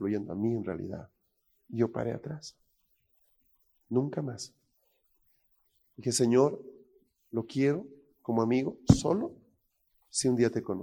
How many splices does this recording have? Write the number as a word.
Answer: zero